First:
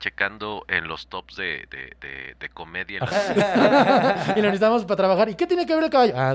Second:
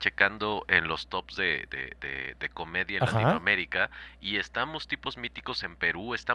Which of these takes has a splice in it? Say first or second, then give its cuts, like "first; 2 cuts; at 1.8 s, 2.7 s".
first; 1 cut; at 3.1 s